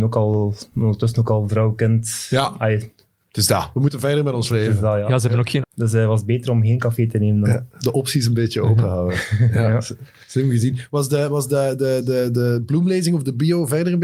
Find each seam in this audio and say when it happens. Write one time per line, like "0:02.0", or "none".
0:05.6